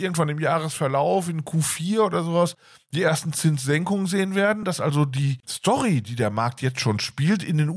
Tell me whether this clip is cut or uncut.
uncut